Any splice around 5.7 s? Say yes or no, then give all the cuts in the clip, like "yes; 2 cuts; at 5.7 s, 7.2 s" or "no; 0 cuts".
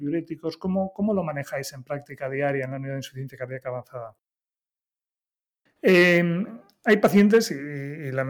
yes; 1 cut; at 5.7 s